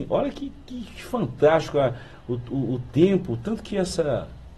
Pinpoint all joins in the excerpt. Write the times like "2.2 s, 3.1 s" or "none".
none